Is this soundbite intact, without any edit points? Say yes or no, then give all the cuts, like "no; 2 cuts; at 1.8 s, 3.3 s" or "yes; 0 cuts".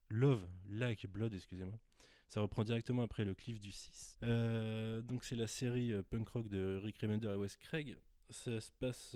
no; 1 cut; at 4.1 s